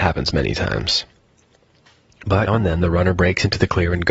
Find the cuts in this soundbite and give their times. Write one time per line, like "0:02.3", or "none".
0:02.5